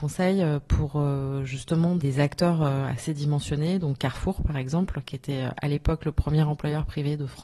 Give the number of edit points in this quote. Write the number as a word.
zero